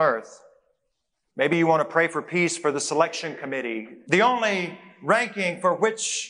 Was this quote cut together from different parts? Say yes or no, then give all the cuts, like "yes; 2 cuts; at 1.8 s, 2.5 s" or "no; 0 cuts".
yes; 2 cuts; at 1.3 s, 4.1 s